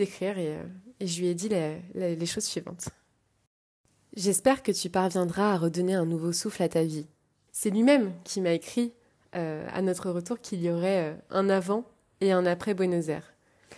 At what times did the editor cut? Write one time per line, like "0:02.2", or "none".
0:07.5